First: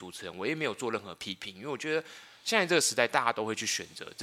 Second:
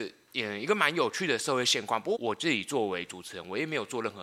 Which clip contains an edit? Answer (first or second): second